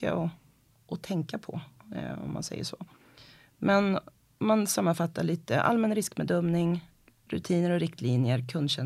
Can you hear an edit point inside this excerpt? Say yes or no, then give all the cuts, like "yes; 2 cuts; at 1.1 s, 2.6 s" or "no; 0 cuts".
no; 0 cuts